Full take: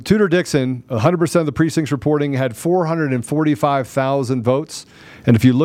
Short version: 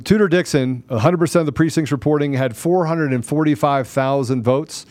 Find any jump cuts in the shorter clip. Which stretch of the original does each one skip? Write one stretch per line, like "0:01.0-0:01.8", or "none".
none